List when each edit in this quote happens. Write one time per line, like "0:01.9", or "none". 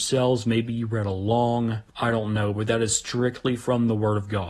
0:01.9